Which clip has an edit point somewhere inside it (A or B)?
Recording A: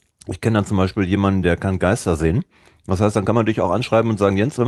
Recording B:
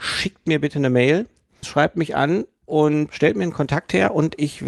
B